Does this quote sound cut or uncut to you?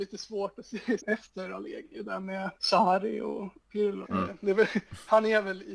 cut